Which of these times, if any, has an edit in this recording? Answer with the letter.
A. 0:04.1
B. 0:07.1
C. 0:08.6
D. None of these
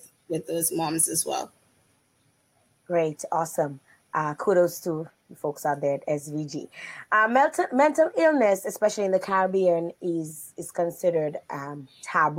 D